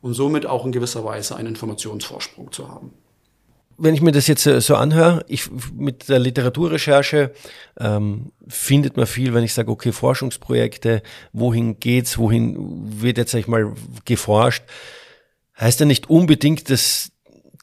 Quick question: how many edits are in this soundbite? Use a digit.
1